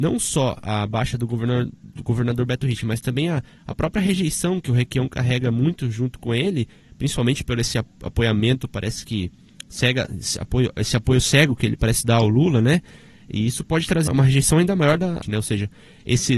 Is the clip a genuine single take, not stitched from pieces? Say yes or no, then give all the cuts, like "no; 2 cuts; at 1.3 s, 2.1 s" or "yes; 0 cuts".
no; 2 cuts; at 14.1 s, 15.2 s